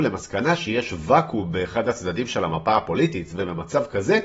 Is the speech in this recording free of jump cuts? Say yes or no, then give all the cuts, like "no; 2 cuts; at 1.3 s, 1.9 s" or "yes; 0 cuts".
yes; 0 cuts